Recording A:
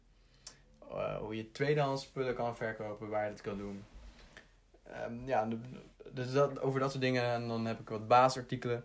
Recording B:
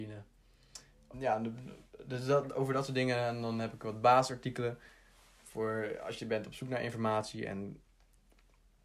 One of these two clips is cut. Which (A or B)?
B